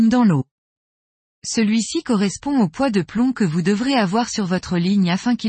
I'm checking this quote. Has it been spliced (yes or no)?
yes